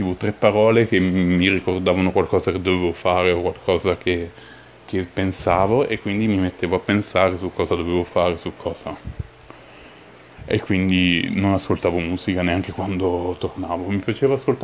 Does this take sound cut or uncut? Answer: uncut